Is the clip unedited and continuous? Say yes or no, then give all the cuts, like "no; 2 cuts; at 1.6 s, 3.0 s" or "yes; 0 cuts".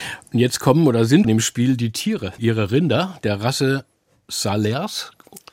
no; 2 cuts; at 1.2 s, 2.4 s